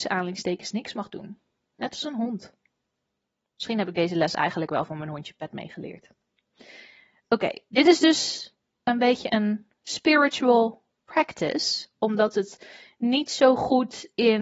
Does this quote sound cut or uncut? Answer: uncut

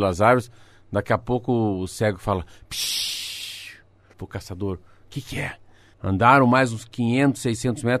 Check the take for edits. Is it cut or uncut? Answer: cut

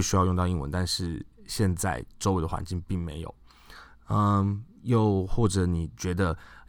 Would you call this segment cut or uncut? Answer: uncut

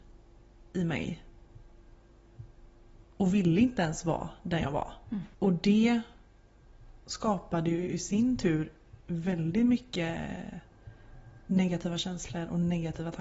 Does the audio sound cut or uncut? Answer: cut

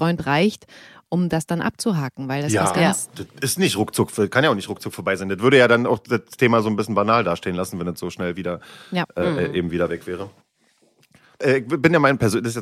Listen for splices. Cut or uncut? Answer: uncut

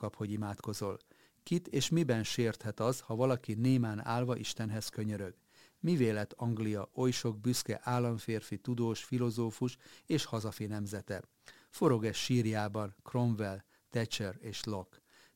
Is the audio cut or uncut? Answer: uncut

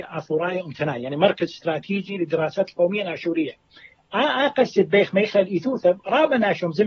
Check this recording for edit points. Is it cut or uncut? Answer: uncut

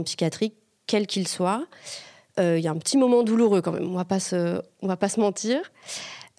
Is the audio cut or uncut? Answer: uncut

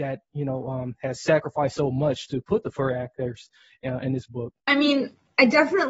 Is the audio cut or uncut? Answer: cut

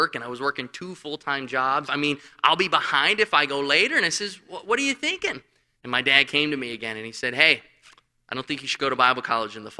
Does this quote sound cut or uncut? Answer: cut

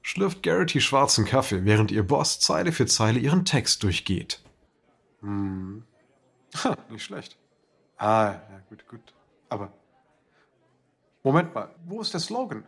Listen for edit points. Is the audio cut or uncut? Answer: cut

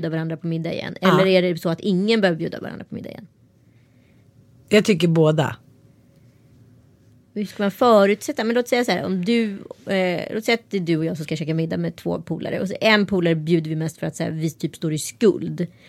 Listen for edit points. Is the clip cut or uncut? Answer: uncut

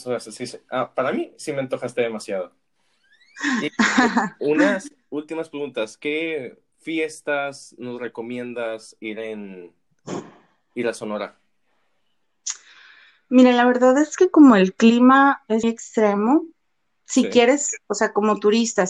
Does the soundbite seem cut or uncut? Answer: cut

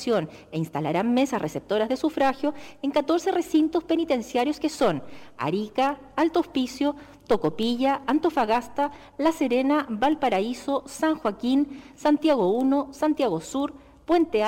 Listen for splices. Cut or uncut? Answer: uncut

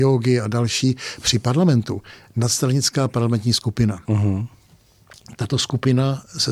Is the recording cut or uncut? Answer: cut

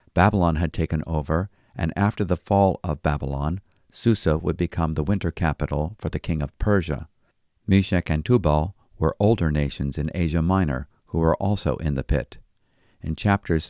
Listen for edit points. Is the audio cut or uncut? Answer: uncut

